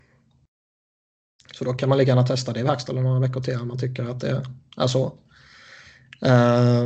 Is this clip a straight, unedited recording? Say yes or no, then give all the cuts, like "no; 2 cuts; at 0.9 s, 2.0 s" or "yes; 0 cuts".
yes; 0 cuts